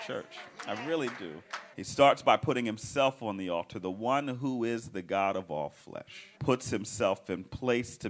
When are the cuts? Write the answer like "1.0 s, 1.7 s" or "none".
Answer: 1.7 s, 6.4 s